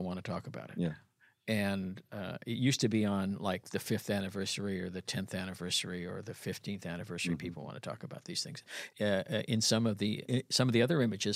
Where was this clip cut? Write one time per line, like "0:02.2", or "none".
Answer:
0:08.9
0:10.2